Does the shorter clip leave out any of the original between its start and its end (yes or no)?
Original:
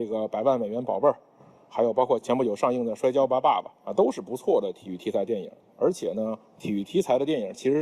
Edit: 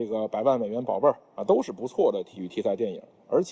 yes